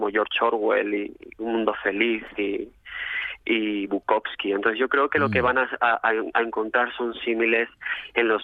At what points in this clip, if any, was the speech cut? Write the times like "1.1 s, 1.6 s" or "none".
none